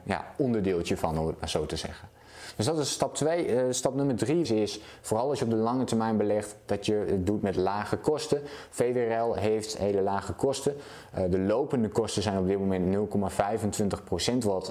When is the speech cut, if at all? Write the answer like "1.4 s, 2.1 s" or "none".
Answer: 4.4 s